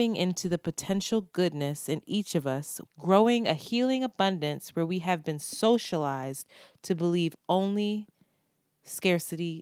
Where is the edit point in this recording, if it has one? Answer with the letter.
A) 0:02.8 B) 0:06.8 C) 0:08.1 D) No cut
A